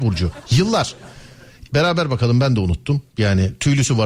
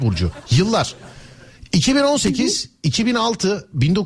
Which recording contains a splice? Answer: first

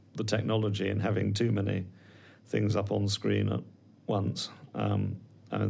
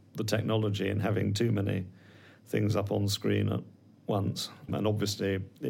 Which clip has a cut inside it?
second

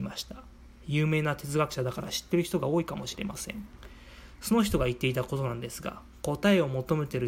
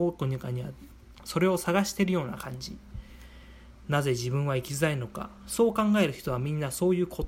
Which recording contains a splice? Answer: second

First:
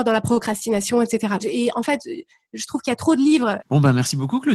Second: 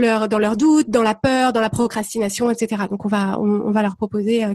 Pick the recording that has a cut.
first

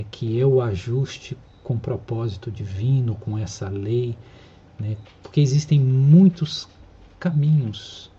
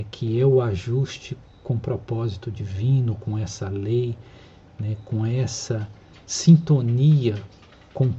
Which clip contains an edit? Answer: first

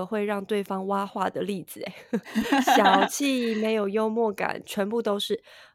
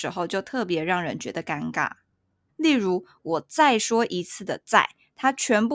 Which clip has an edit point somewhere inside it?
second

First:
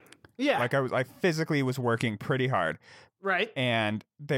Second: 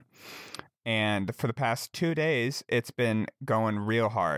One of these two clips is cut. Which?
first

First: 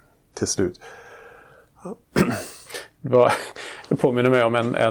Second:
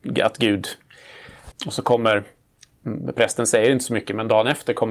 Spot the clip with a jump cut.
second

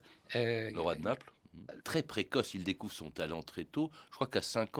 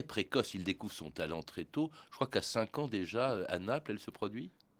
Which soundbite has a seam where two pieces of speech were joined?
first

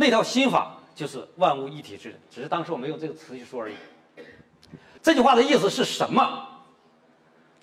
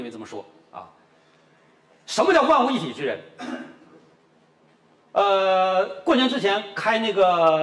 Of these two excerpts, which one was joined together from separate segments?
first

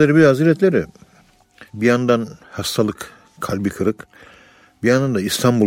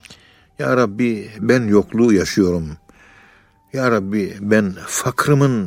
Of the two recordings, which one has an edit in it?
first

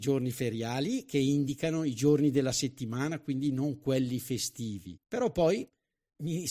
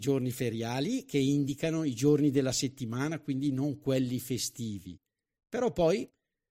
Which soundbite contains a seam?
first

